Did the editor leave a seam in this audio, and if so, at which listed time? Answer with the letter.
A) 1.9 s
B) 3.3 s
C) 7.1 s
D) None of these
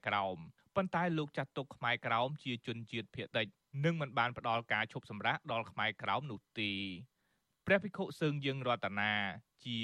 B